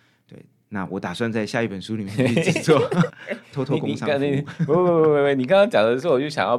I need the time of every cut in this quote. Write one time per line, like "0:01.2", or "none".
0:03.1